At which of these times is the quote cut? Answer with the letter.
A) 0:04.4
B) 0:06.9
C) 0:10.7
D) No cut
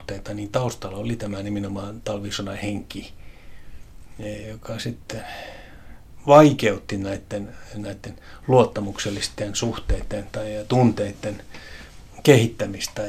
A